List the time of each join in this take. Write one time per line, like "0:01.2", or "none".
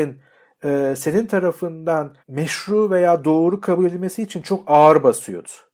0:02.2